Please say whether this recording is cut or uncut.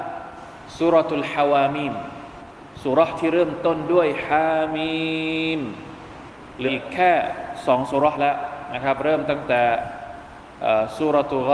cut